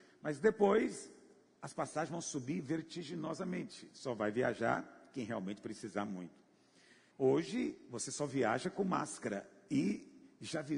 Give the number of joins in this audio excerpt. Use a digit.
1